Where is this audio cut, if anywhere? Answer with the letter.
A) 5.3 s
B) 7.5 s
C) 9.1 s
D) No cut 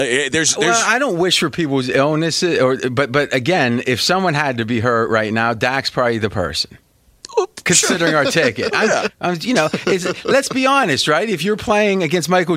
C